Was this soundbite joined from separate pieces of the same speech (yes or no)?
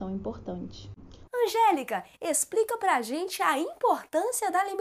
yes